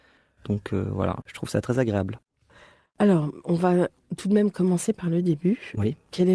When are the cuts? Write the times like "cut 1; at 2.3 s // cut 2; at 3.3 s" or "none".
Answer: cut 1; at 1.2 s